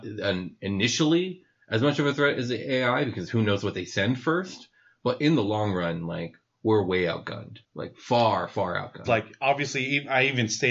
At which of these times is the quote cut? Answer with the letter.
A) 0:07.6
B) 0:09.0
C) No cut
B